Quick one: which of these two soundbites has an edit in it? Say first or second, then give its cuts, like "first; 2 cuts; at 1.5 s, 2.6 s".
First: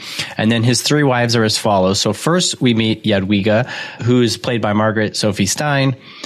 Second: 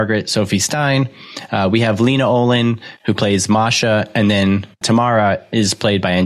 second; 1 cut; at 4.8 s